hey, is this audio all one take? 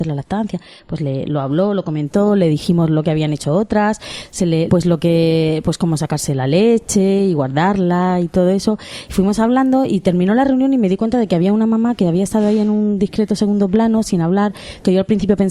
no; 2 cuts; at 4.7 s, 9.1 s

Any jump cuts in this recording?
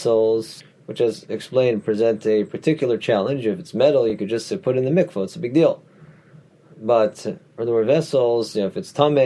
no; 0 cuts

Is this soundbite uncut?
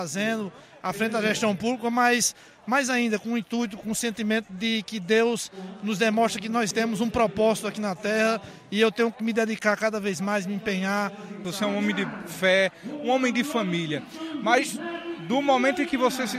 no; 2 cuts; at 6.7 s, 11.4 s

